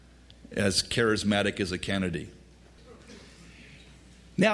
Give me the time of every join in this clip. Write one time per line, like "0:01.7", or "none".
none